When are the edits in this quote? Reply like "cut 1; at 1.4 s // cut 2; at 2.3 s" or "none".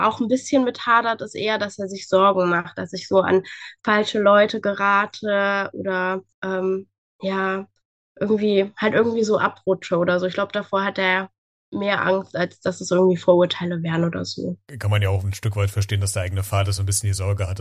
cut 1; at 6.3 s

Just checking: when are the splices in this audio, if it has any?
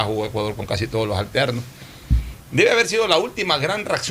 cut 1; at 2.4 s

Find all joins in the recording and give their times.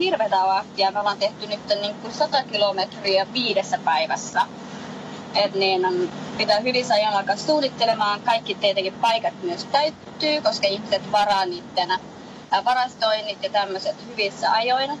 cut 1; at 5.5 s

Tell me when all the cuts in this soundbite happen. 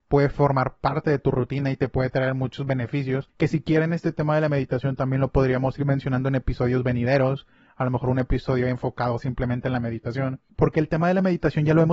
none

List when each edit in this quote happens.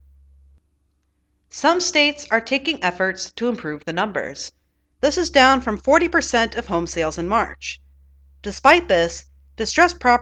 cut 1; at 5.0 s

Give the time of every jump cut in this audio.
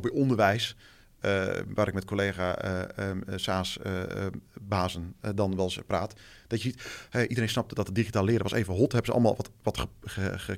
none

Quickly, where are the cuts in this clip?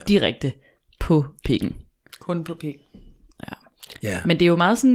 none

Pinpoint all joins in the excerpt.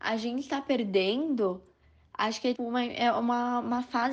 cut 1; at 2.5 s

